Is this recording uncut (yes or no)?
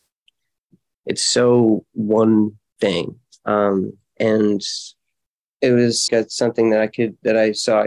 no